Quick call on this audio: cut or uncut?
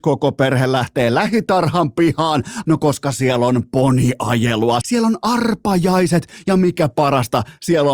cut